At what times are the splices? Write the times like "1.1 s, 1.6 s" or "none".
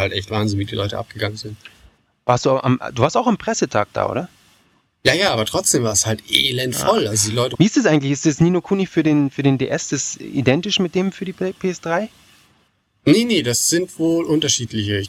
7.5 s